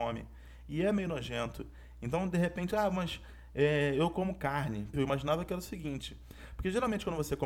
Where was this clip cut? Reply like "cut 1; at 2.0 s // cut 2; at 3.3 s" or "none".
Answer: cut 1; at 4.9 s